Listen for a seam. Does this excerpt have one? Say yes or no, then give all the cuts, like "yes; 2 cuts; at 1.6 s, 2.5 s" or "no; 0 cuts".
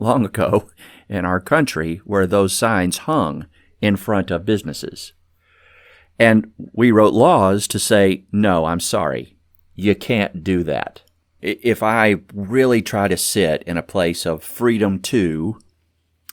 yes; 1 cut; at 11.4 s